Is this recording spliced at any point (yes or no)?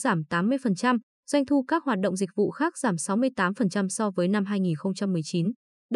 no